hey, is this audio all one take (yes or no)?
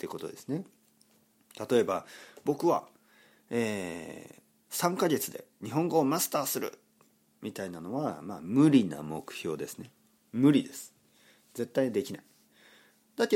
yes